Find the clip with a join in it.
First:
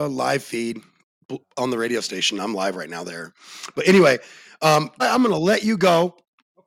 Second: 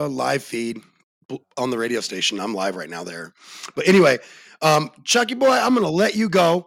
first; 1 cut; at 5.0 s

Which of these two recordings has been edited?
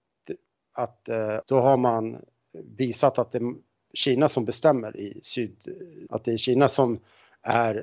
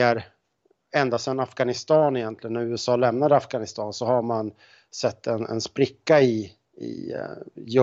first; 2 cuts; at 1.4 s, 6.1 s

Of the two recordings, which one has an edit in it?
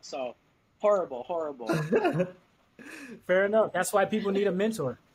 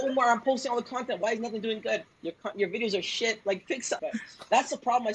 second; 1 cut; at 4.0 s

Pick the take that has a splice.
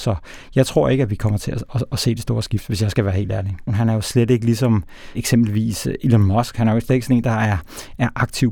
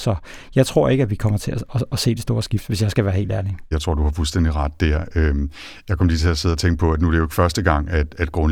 first; 1 cut; at 3.7 s

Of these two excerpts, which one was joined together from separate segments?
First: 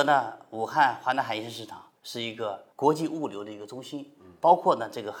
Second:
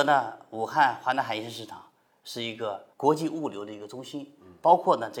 first; 1 cut; at 2.0 s

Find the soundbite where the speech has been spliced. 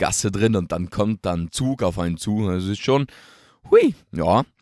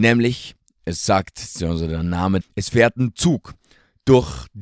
second; 1 cut; at 2.4 s

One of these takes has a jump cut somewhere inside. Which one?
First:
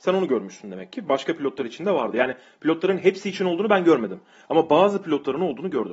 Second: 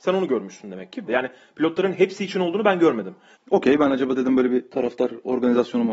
second; 2 cuts; at 1.1 s, 3.3 s

